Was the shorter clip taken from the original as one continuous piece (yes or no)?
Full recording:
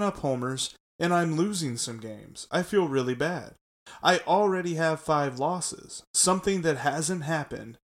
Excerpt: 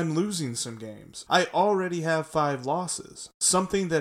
no